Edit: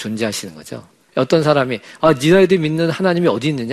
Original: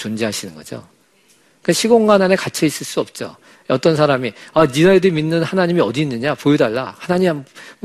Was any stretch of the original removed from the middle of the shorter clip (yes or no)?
yes